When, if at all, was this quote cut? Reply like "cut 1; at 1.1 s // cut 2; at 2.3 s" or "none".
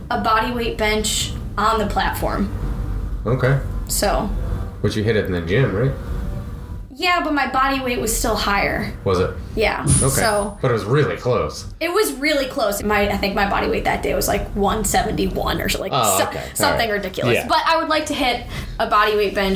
cut 1; at 12.8 s